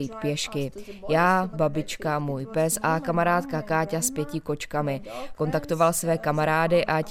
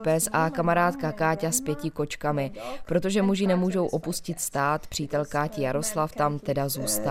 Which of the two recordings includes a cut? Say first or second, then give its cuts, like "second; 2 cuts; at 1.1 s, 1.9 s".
first; 2 cuts; at 1.5 s, 5.4 s